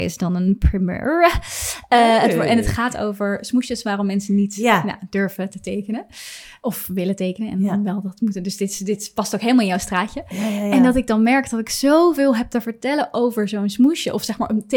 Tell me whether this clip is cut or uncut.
uncut